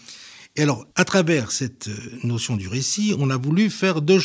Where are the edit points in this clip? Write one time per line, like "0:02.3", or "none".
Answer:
0:00.9